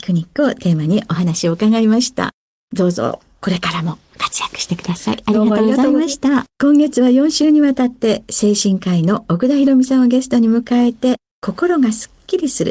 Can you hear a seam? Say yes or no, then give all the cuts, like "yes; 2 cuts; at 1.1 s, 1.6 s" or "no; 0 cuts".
yes; 1 cut; at 6.5 s